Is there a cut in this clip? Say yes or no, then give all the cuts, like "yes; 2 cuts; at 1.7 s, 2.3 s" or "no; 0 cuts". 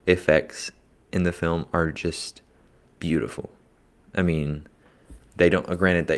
no; 0 cuts